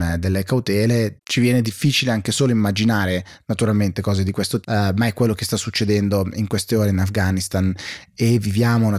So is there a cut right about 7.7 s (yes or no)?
no